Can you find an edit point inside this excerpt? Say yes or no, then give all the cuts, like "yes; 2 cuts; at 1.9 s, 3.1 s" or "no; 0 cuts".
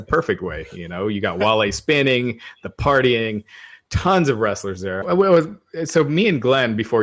yes; 1 cut; at 5.0 s